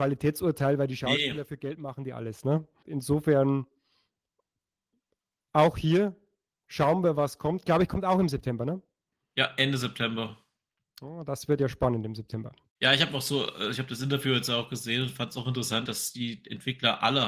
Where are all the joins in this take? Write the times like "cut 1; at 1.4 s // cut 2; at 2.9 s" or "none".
cut 1; at 2.8 s // cut 2; at 12.7 s // cut 3; at 15.9 s